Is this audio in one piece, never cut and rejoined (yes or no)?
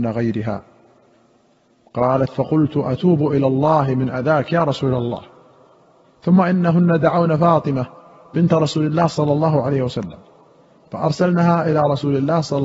yes